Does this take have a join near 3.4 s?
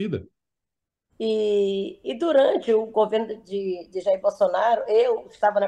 no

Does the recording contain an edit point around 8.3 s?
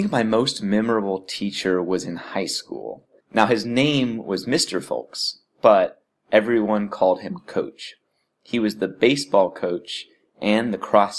no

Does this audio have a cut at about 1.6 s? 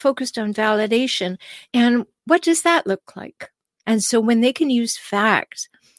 no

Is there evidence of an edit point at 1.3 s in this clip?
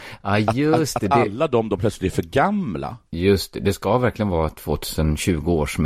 no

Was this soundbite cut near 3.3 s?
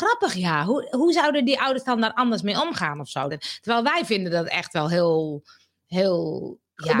yes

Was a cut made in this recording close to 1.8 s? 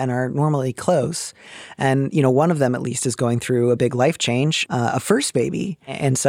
no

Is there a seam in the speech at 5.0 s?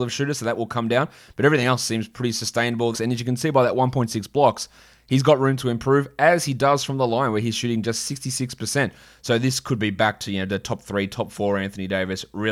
no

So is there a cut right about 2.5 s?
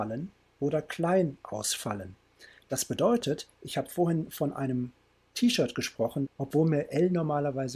no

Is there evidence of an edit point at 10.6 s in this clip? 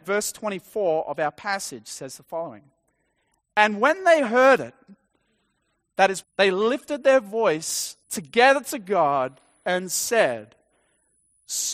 no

